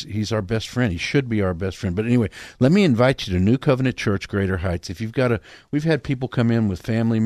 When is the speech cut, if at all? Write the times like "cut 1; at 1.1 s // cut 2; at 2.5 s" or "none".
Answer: none